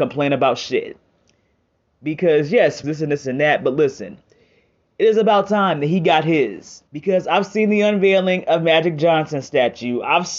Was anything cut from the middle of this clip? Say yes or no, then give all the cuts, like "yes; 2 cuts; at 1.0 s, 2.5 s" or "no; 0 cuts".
yes; 2 cuts; at 2.8 s, 6.9 s